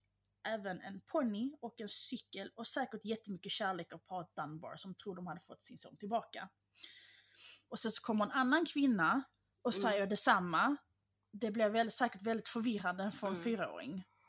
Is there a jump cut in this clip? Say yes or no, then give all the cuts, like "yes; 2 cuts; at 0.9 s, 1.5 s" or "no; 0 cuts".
yes; 1 cut; at 7.7 s